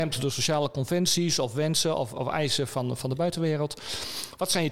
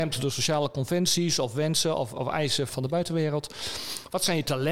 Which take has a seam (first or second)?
second